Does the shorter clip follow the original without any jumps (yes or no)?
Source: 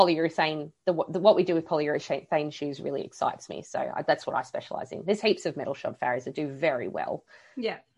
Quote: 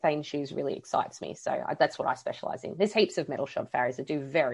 yes